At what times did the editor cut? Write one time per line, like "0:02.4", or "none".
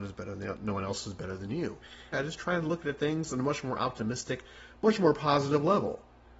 0:02.1